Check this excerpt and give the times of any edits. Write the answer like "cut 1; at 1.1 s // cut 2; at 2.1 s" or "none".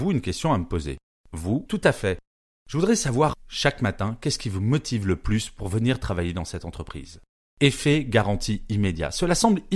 cut 1; at 1.7 s // cut 2; at 3.3 s